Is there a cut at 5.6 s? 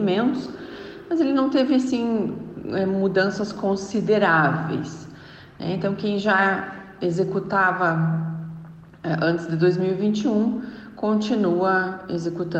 no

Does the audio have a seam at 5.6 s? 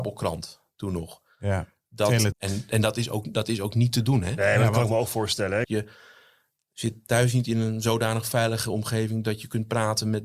yes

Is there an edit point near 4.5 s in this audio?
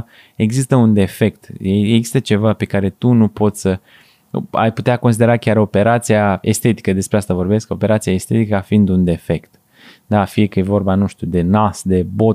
no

